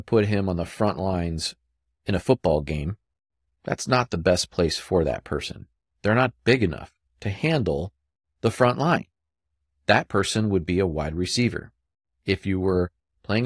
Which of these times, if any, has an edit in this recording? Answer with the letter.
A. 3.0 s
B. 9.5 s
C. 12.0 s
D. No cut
D